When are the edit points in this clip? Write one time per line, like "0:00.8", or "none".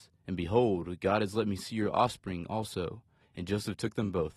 0:03.2